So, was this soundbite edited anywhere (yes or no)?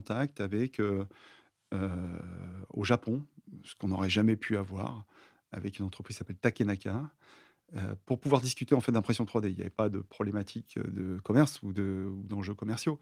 no